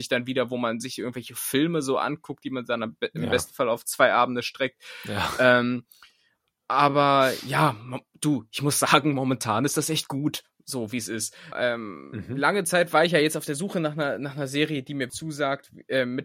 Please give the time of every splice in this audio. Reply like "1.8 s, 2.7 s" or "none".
11.5 s, 15.1 s